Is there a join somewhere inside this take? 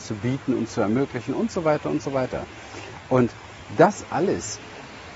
no; 0 cuts

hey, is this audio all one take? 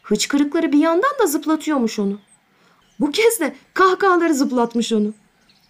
no; 1 cut; at 2.8 s

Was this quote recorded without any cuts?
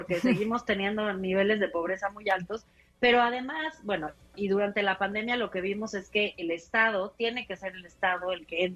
yes; 0 cuts

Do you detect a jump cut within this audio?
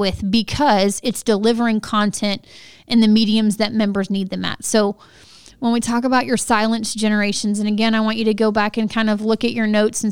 no; 0 cuts

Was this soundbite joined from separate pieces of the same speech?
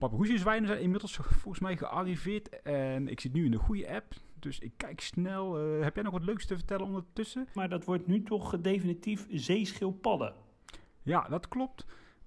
yes; 1 cut; at 7.6 s

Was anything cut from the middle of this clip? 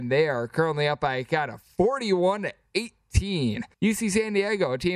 yes; 1 cut; at 3.7 s

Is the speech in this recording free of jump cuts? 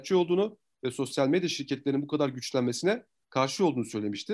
yes; 0 cuts

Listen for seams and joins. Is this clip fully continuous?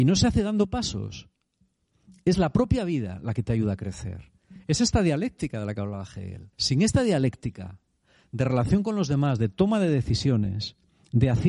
no; 1 cut; at 6.5 s

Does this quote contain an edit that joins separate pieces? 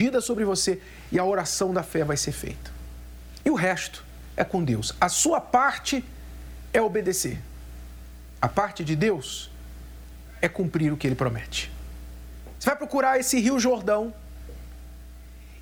yes; 2 cuts; at 3.4 s, 12.5 s

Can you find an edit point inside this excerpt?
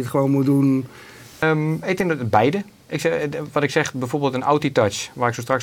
yes; 1 cut; at 1.4 s

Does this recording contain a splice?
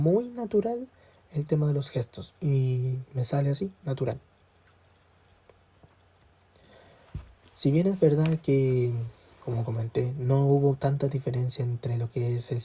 yes; 2 cuts; at 2.3 s, 3.8 s

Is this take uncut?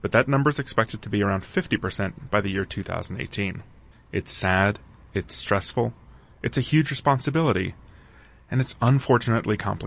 no; 1 cut; at 3.9 s

